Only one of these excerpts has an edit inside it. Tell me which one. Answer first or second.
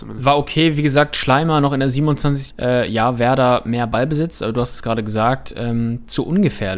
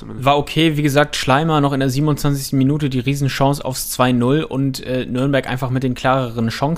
first